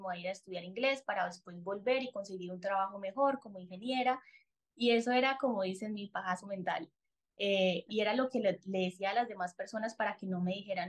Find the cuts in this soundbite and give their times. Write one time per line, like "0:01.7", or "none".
none